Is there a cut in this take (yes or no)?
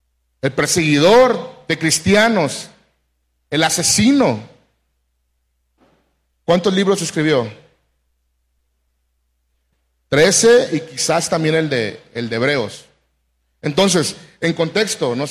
no